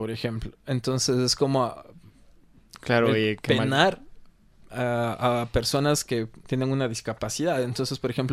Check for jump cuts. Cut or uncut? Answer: cut